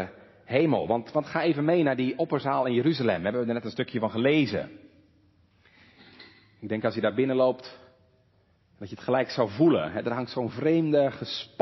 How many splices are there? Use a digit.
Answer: 0